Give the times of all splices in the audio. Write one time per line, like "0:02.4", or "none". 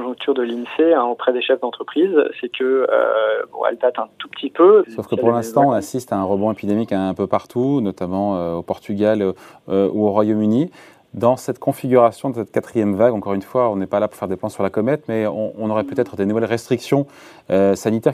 0:04.8